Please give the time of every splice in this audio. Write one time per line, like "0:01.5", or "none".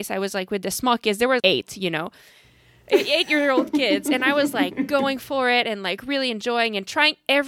0:01.4